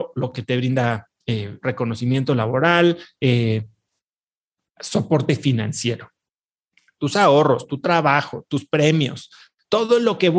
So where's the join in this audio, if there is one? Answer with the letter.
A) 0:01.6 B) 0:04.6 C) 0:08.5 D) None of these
A